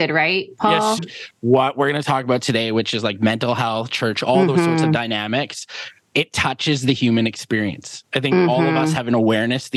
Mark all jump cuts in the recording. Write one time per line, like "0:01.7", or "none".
0:01.0